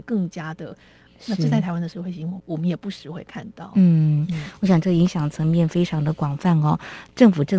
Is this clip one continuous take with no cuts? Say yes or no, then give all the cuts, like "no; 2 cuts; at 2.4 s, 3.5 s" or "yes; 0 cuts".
no; 1 cut; at 1.1 s